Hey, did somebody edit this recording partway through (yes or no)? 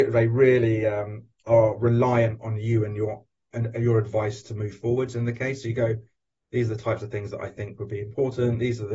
no